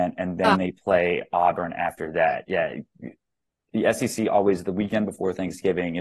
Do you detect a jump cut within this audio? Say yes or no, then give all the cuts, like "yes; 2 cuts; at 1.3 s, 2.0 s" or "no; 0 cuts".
no; 0 cuts